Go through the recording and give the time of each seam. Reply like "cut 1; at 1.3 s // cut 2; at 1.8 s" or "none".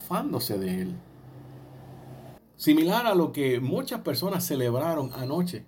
cut 1; at 2.4 s

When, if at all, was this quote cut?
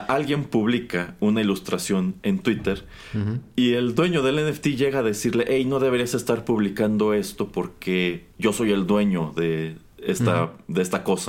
cut 1; at 8.3 s

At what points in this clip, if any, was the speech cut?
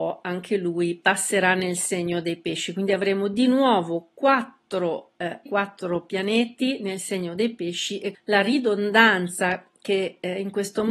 cut 1; at 5.5 s // cut 2; at 8.1 s

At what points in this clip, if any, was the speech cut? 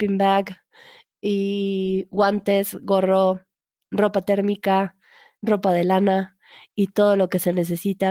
cut 1; at 5.4 s

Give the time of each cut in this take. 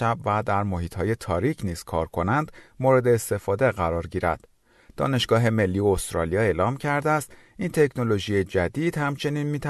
none

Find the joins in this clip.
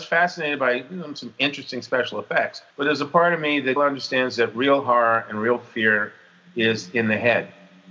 cut 1; at 2.7 s // cut 2; at 3.8 s

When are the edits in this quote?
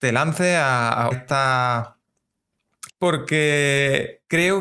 cut 1; at 1.1 s // cut 2; at 2.9 s

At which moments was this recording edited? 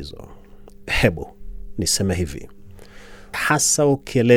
cut 1; at 3.3 s

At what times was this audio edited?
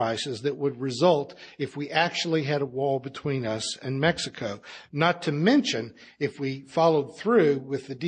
none

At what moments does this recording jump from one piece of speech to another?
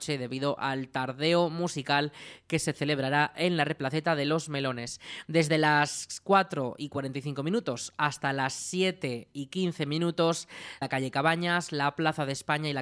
cut 1; at 5.2 s // cut 2; at 10.8 s

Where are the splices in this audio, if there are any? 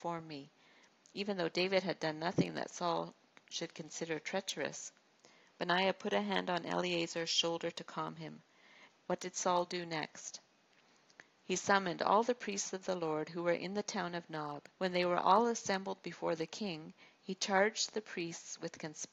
cut 1; at 8.9 s // cut 2; at 14.7 s

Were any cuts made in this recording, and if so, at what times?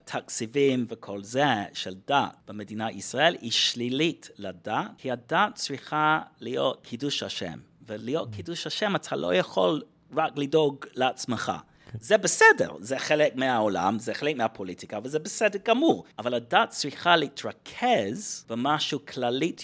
none

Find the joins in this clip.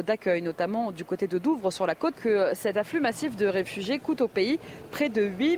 cut 1; at 2.1 s

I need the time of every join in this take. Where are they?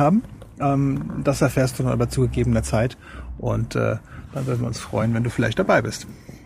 none

